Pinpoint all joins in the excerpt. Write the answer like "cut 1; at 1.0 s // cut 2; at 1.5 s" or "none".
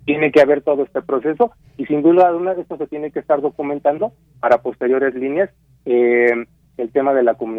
none